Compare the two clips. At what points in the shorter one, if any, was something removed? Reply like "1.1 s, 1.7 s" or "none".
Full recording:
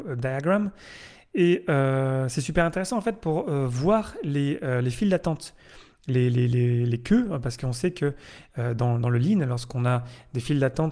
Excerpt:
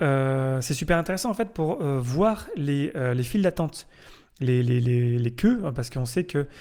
none